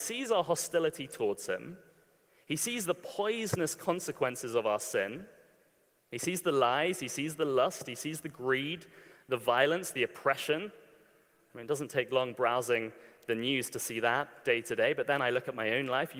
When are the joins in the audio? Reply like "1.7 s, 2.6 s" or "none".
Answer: none